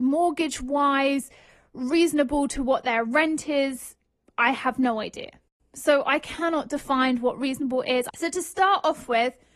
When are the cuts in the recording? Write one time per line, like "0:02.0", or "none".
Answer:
0:08.1